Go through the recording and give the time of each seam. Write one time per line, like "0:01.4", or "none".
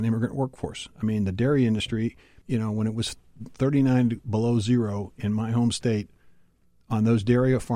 0:02.4